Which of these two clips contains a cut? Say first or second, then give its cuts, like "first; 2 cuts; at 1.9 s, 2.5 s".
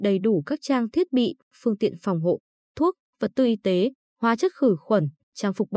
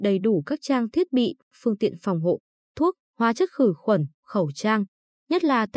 second; 2 cuts; at 3.0 s, 4.2 s